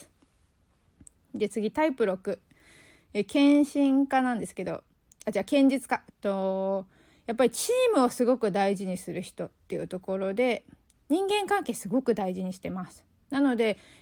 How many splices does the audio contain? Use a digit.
2